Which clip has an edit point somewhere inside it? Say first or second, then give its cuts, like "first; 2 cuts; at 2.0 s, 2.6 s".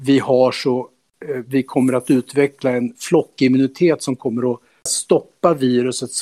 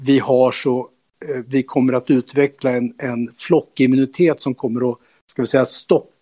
first; 2 cuts; at 2.9 s, 4.9 s